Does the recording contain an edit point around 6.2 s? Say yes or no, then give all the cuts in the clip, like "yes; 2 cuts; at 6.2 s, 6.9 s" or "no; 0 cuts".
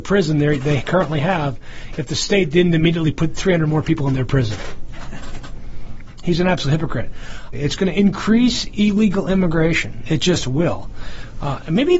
yes; 2 cuts; at 6.2 s, 7.5 s